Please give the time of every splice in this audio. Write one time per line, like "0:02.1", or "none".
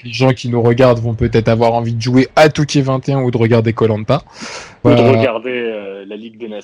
0:04.8

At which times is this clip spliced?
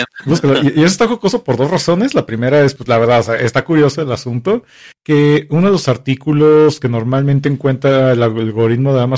0:02.8
0:04.9

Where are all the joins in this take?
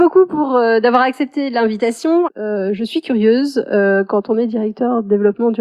0:02.3

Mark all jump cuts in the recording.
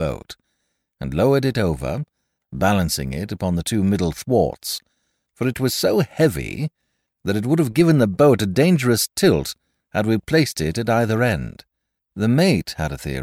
0:12.0

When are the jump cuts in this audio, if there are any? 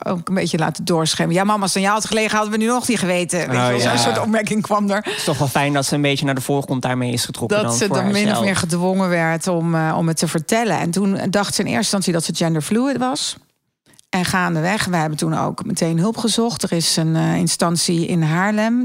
none

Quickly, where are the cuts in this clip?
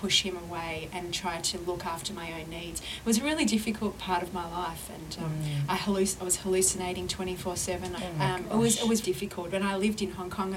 0:08.0
0:09.0

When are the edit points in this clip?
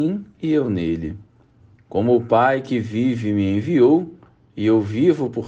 none

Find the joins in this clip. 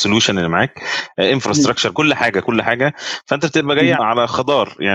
0:01.9
0:04.0

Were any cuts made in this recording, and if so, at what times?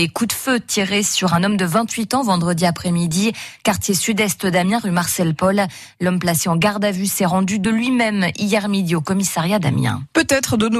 none

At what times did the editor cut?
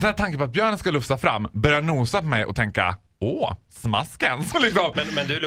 none

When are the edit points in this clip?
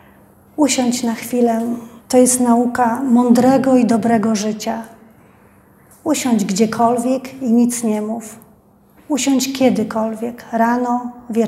0:02.0

